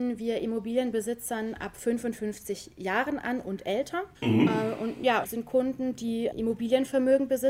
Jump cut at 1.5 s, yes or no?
no